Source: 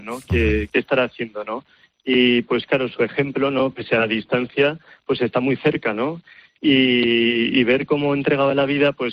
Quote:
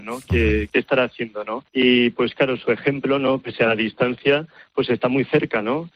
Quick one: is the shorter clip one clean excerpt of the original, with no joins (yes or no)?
no